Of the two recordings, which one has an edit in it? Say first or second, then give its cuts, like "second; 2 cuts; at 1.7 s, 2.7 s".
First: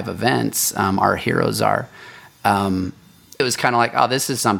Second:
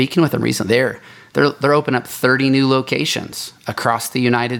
first; 1 cut; at 3.4 s